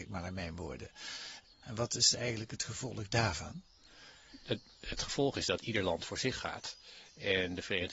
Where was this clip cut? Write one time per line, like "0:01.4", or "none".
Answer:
0:01.5